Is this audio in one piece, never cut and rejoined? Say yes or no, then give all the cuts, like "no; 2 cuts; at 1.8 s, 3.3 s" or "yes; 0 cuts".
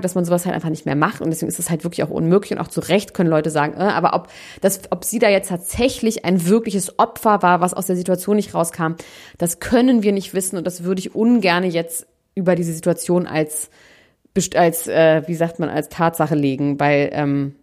yes; 0 cuts